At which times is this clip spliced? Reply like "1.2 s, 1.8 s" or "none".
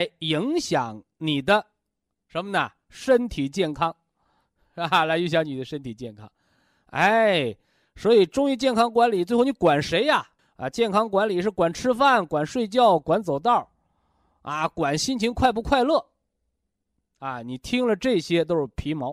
10.4 s